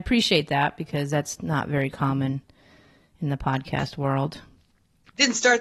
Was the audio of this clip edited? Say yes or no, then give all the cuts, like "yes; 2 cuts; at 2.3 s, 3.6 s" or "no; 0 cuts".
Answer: no; 0 cuts